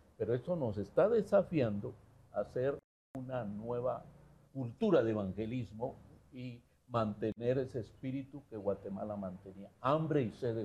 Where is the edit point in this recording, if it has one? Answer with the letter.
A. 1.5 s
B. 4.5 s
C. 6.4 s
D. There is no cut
B